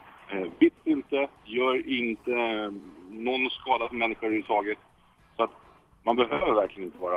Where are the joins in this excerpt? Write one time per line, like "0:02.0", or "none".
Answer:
none